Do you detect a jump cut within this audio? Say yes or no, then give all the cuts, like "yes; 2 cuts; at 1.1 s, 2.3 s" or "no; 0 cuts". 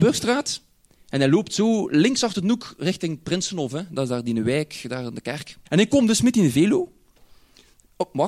yes; 1 cut; at 5.7 s